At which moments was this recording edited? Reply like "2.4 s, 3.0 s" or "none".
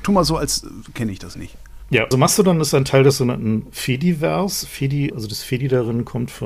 2.1 s, 5.1 s